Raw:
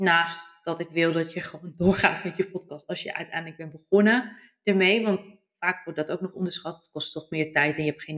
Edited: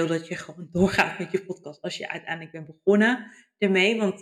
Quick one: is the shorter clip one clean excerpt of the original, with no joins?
yes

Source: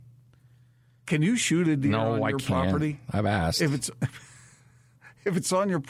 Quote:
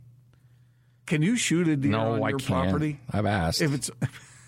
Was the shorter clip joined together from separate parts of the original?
no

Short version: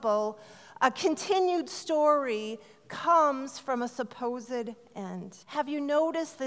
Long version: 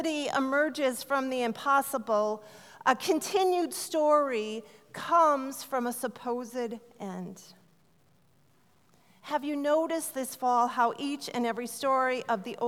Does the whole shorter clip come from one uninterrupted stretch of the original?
no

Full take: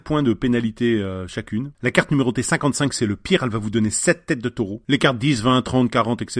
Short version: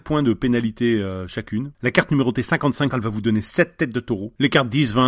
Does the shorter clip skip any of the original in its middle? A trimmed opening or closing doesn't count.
yes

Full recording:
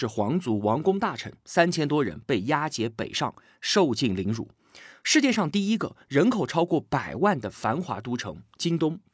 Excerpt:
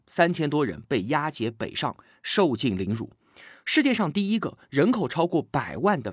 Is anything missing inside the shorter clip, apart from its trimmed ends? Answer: no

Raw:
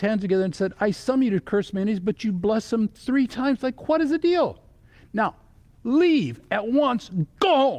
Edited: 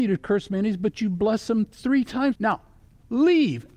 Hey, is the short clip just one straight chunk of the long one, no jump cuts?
no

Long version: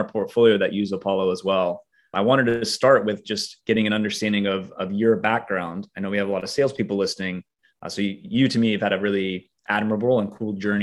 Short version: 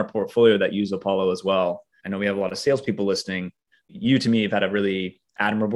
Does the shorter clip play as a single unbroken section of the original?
no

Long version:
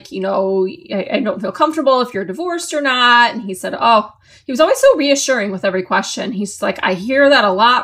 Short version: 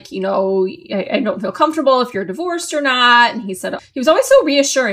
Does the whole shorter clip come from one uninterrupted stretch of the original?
no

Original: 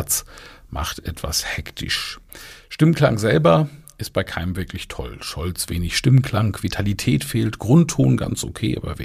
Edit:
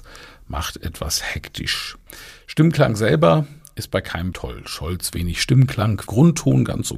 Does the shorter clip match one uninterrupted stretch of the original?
no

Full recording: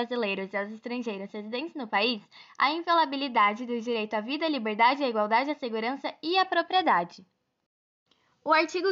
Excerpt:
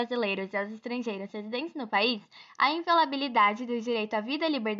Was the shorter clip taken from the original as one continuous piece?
yes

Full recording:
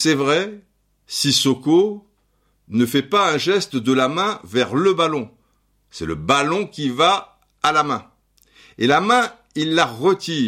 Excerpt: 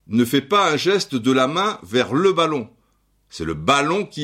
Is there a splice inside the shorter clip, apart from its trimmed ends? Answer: no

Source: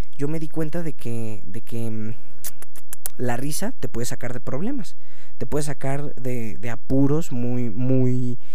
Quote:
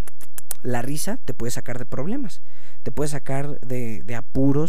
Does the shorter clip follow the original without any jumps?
yes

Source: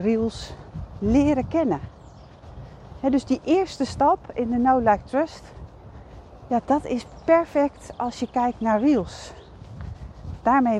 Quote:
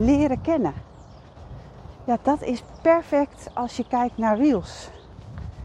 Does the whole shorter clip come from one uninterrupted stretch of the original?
no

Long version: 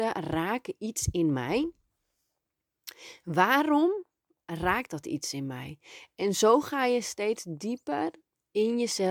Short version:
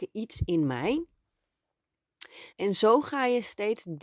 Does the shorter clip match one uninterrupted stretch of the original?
no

